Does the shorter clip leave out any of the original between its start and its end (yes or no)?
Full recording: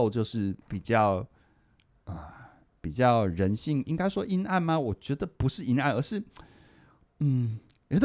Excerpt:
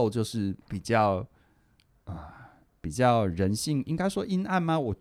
no